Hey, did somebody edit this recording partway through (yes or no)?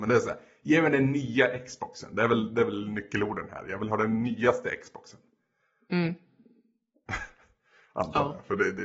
no